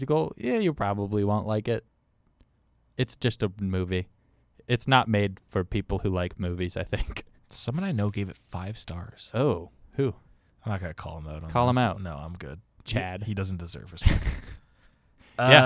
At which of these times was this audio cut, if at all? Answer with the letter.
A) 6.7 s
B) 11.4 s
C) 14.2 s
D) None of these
D